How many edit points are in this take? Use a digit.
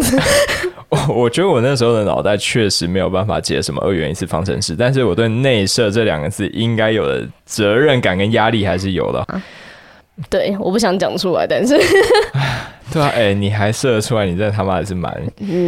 2